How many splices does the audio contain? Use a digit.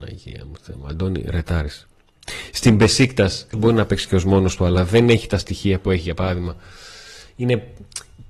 1